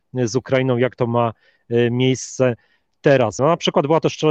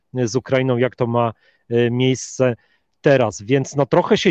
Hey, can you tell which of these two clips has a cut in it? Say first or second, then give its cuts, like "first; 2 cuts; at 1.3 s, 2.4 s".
first; 1 cut; at 3.4 s